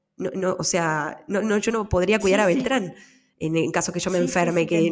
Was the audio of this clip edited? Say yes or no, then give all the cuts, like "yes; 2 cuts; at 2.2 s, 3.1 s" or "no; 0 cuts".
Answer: no; 0 cuts